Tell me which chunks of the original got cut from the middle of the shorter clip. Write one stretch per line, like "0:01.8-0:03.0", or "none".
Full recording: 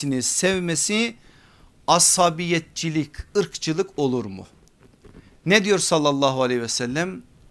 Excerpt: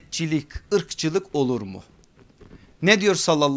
none